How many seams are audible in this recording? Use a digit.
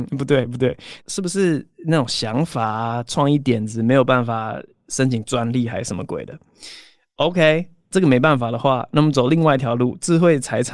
1